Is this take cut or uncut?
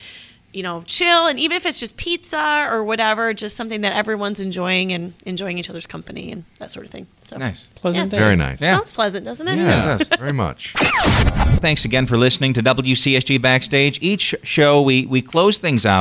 uncut